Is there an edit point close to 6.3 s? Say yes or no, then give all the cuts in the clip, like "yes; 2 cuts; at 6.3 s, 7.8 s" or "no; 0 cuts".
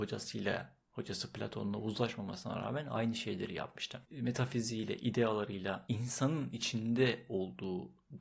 no; 1 cut; at 4.0 s